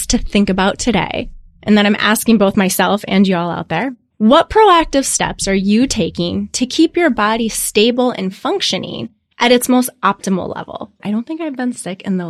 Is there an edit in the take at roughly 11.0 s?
yes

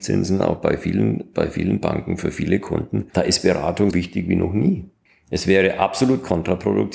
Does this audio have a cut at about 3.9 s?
yes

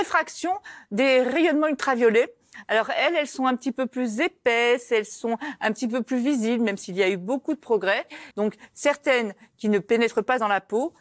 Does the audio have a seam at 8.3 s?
yes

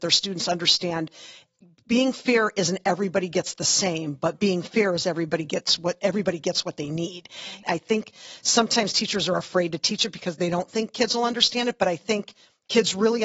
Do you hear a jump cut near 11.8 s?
no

